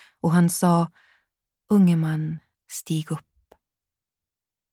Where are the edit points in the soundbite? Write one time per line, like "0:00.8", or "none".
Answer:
0:02.5